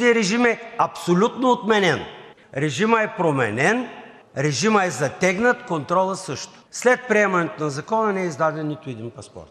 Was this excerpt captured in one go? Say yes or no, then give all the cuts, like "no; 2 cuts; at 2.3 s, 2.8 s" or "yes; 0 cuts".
no; 1 cut; at 2.4 s